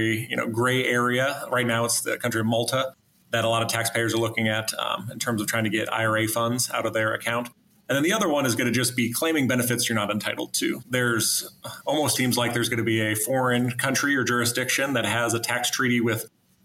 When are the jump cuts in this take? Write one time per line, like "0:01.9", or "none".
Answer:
0:10.8
0:12.2